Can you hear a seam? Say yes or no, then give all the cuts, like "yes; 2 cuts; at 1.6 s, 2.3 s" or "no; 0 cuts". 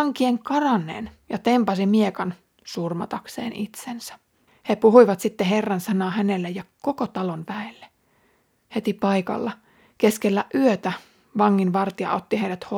yes; 1 cut; at 4.5 s